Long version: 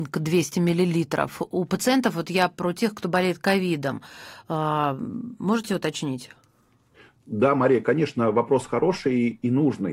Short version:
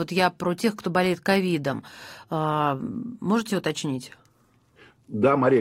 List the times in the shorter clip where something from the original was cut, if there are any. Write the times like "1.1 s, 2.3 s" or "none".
none